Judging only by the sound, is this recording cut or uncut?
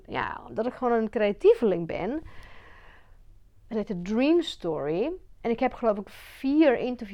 cut